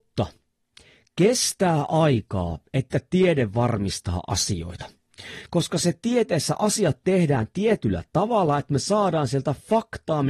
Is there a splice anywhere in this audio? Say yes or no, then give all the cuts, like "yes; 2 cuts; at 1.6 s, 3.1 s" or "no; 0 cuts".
no; 0 cuts